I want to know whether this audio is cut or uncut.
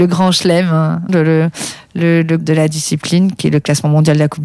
cut